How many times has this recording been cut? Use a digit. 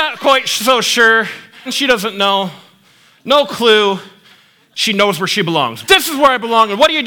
3